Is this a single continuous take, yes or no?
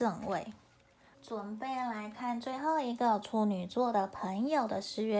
no